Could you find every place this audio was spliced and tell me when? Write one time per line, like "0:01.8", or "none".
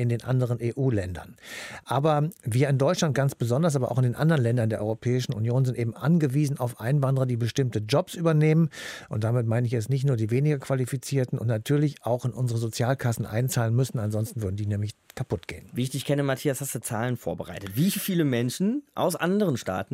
0:01.8